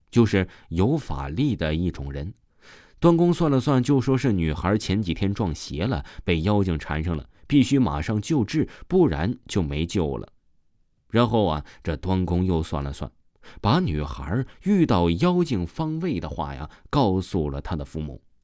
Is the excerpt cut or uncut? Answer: uncut